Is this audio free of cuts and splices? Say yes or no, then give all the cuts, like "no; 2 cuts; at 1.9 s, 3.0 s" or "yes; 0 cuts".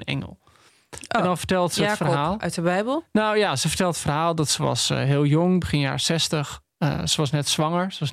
yes; 0 cuts